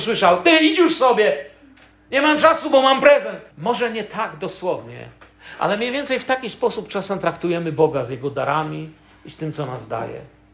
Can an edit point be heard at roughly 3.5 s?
yes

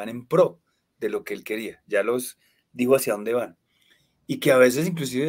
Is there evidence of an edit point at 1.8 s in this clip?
no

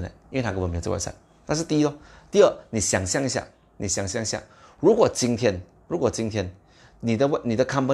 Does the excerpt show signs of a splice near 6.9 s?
no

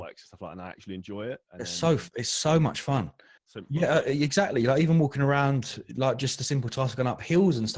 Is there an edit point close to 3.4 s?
yes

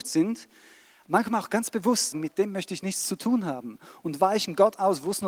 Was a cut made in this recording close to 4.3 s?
no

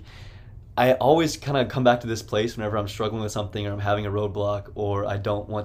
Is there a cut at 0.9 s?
no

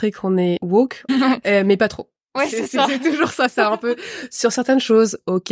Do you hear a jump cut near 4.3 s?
no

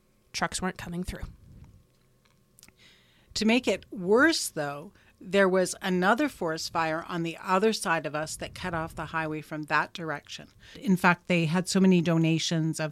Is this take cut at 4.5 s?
no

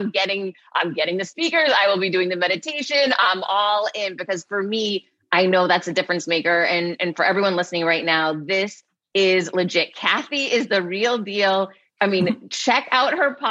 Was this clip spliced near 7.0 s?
no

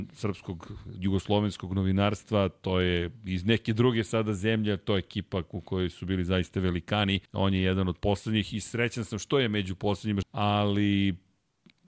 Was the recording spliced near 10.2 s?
yes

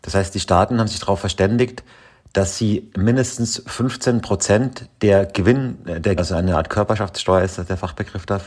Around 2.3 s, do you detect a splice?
no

